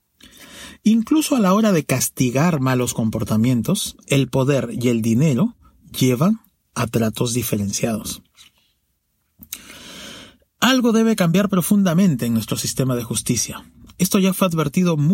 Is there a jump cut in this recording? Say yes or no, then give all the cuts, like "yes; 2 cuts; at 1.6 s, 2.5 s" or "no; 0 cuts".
no; 0 cuts